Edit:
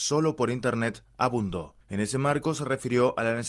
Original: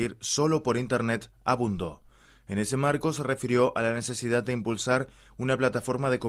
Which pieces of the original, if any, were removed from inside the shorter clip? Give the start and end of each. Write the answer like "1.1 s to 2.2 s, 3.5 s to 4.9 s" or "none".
2.1 s to 2.4 s